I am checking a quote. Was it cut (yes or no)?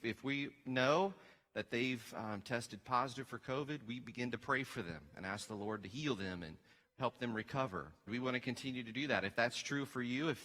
yes